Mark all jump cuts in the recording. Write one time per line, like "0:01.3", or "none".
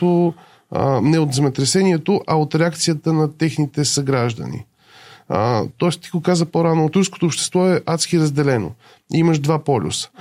0:06.9